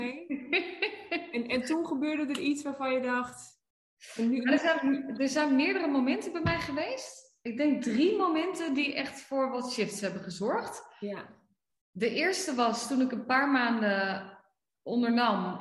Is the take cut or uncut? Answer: uncut